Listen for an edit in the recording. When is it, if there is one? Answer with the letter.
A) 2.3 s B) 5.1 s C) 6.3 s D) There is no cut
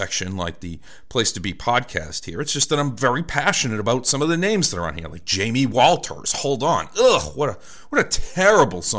D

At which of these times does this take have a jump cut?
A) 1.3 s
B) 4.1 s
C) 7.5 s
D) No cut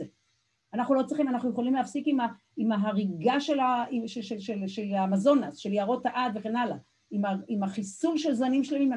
D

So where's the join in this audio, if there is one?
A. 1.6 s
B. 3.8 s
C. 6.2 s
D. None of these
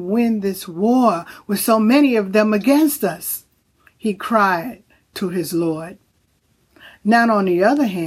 D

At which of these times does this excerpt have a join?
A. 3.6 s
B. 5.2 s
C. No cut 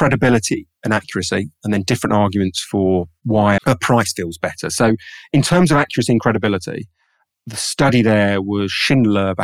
A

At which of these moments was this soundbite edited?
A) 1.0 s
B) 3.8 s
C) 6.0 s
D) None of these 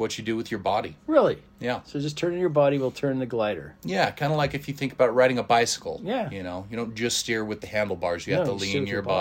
A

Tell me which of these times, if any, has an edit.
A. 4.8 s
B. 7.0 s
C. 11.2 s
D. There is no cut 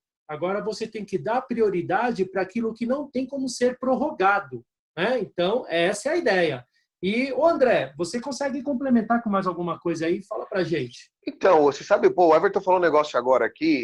C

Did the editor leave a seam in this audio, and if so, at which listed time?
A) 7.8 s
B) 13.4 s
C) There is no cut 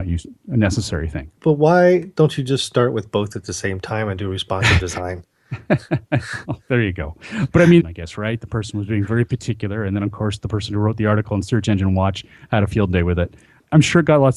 A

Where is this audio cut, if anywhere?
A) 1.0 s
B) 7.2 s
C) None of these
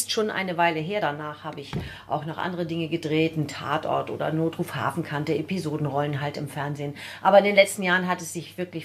A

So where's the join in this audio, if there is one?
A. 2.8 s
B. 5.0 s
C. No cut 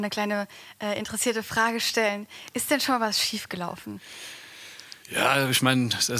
B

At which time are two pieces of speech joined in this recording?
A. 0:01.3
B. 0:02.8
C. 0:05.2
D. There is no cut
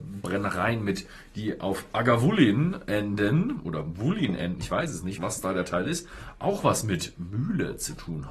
C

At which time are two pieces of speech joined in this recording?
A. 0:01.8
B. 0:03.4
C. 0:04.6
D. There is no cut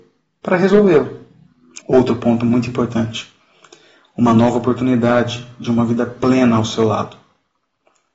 A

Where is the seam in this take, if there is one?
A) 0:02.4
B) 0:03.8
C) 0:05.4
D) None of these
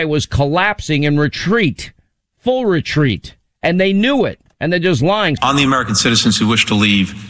C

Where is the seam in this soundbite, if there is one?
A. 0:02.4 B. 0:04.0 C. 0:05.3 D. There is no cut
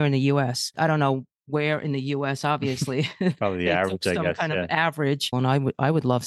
C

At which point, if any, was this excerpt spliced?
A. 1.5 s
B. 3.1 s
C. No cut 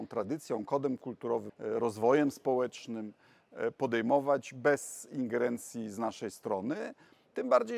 A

